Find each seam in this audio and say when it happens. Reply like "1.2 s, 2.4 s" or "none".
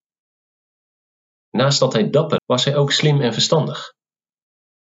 2.4 s